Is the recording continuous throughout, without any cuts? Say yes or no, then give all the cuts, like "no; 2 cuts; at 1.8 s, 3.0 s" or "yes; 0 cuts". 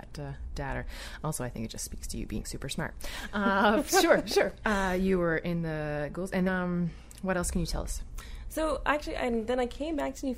no; 1 cut; at 6.5 s